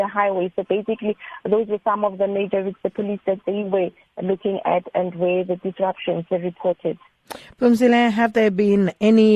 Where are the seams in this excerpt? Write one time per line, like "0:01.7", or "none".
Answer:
0:03.4